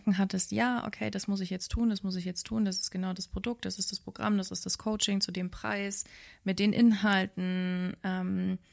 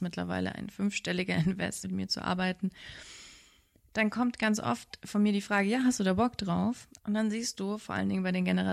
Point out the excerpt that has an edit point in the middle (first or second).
second